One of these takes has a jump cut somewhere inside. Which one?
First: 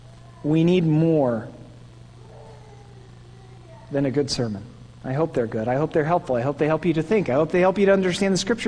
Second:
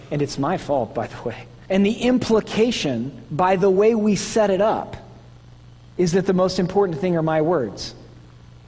second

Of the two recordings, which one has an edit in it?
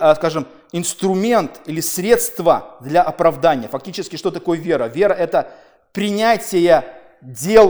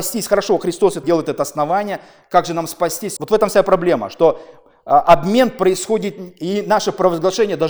second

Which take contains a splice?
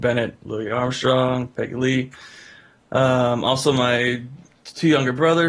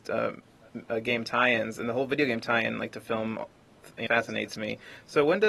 second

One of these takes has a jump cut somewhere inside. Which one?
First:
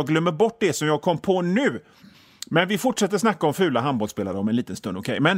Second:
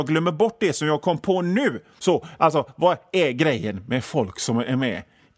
second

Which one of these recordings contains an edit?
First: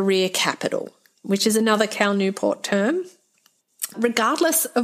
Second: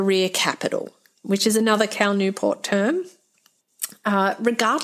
first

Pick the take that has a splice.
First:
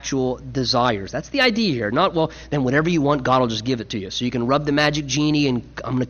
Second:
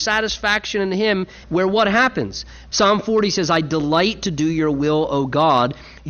second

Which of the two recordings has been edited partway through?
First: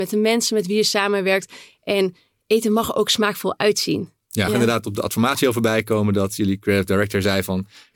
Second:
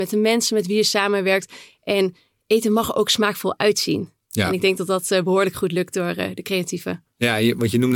first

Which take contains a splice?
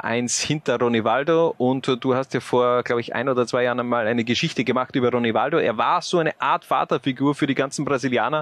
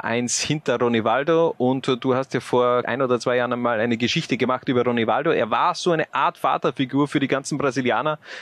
second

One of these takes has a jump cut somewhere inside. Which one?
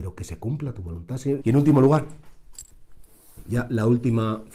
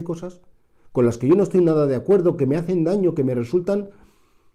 first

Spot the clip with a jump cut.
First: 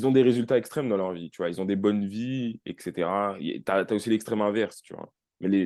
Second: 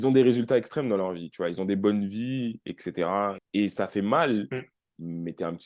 second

